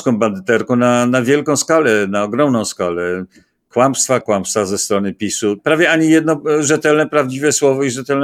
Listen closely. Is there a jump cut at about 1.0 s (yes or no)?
no